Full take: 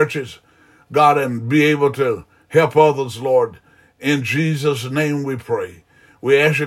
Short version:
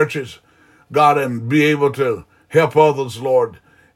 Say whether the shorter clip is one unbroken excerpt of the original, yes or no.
yes